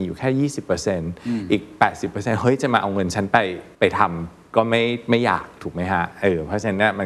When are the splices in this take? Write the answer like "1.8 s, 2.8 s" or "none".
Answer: 3.7 s